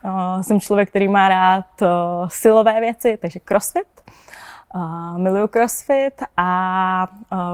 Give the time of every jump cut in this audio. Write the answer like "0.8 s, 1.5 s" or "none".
none